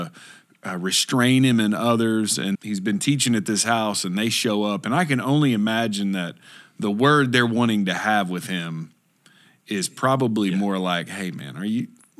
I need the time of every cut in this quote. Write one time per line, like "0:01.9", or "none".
0:02.5